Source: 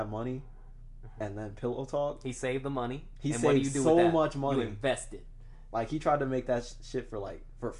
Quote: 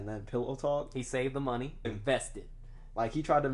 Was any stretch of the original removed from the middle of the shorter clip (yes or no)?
yes